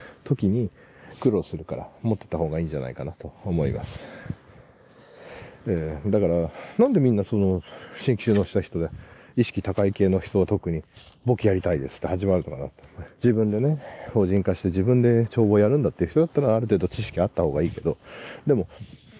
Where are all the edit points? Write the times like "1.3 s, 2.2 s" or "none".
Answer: 13.1 s